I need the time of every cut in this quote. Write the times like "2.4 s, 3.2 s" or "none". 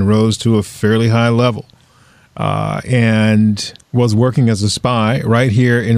3.8 s

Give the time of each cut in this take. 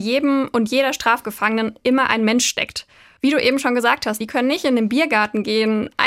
3.2 s, 4.2 s

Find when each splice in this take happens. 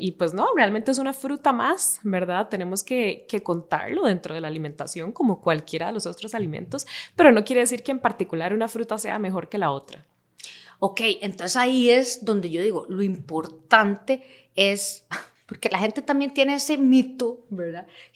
none

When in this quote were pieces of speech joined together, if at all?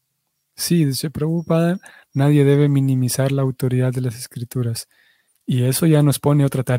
5.3 s

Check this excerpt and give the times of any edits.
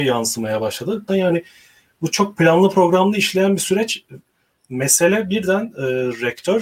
1.1 s

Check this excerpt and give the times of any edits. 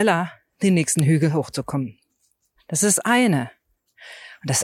2.6 s

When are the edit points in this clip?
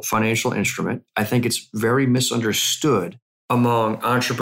none

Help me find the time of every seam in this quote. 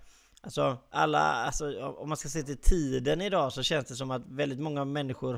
none

